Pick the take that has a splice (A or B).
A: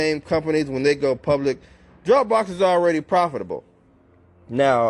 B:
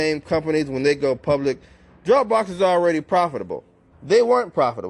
B